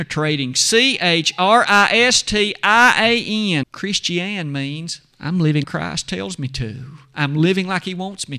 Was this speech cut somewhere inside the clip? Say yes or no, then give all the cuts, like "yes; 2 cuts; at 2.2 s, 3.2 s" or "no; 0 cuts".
yes; 2 cuts; at 3.6 s, 5.6 s